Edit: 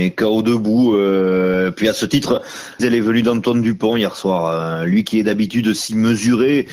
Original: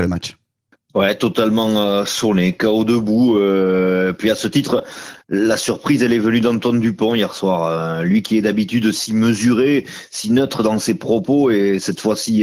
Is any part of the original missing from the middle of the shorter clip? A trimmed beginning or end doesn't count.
yes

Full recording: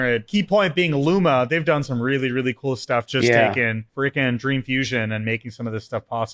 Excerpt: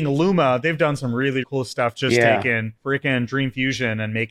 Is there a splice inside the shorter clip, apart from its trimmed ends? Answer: yes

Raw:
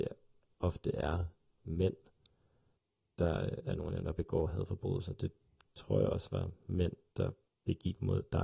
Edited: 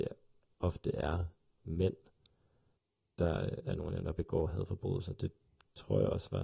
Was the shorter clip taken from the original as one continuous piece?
yes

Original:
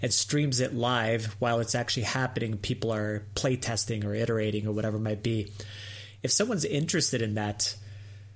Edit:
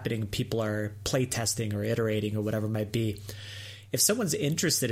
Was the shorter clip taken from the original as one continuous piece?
yes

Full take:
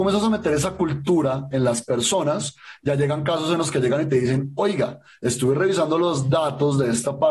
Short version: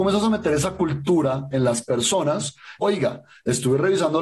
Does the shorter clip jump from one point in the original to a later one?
yes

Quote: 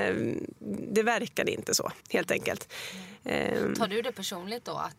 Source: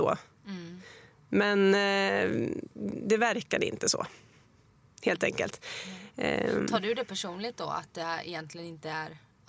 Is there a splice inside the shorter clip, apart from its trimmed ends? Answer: yes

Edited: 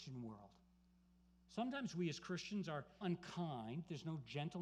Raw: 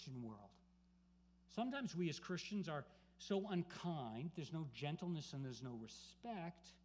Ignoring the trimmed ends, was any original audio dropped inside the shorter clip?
yes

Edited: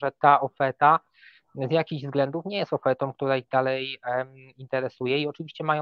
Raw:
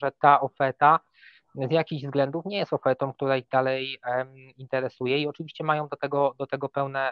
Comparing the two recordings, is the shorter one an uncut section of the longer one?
yes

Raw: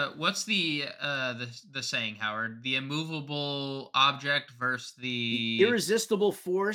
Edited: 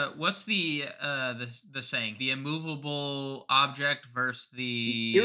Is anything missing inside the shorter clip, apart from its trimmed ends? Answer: yes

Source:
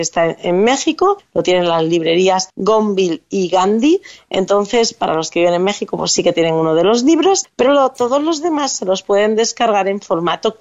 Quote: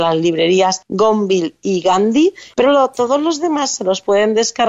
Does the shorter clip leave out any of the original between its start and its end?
yes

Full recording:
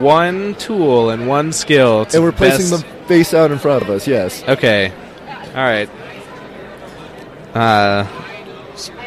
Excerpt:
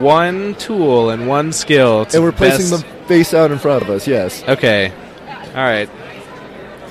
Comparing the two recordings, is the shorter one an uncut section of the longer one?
yes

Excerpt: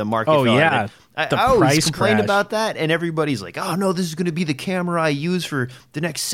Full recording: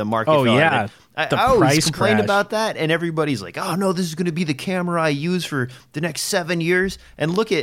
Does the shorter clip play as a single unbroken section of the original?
yes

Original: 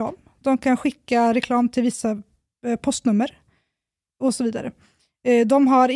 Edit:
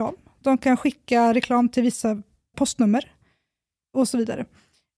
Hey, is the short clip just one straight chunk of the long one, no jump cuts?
no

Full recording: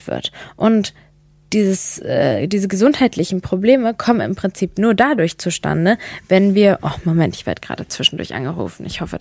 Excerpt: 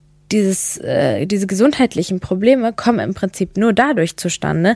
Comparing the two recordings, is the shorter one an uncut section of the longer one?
yes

